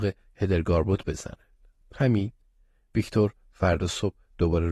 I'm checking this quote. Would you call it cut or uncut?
cut